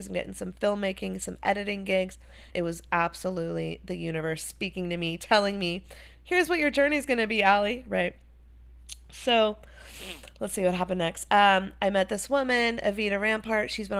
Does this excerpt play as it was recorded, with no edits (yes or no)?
no